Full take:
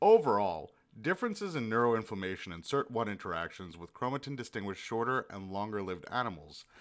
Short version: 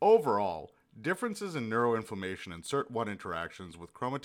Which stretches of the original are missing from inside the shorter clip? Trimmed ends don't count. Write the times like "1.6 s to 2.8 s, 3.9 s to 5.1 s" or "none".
none